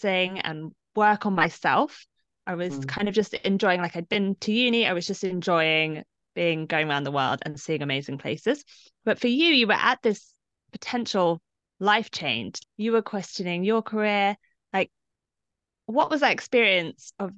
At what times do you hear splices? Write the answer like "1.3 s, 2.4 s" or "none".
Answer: 12.6 s

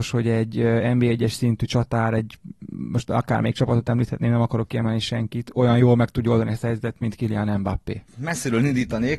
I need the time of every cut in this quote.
none

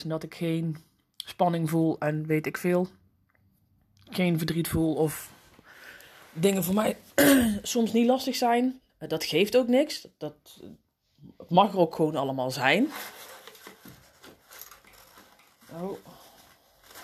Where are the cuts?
8.9 s

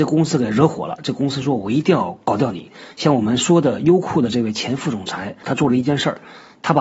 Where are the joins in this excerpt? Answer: 2.9 s, 5.4 s

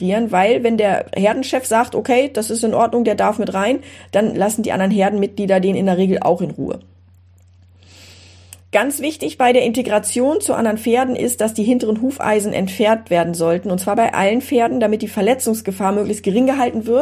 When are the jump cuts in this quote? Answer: none

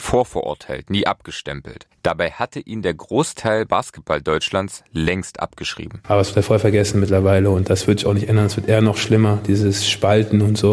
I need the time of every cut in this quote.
6.0 s

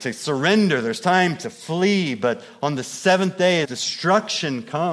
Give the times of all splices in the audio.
3.6 s

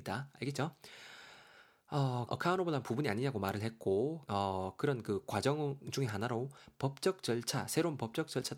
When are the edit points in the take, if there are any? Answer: 2.3 s, 4.3 s

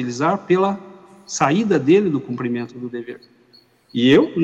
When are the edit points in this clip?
none

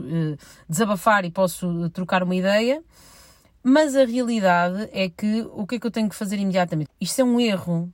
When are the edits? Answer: 6.9 s

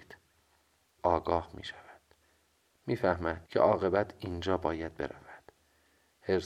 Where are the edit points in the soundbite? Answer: 1.0 s, 3.5 s

